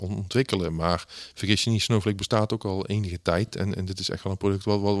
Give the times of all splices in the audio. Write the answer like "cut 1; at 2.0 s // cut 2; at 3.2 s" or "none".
none